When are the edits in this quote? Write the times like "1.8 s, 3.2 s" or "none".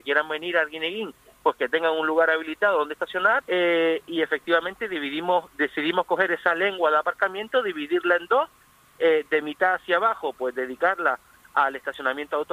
3.4 s